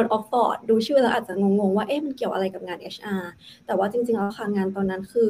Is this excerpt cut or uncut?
uncut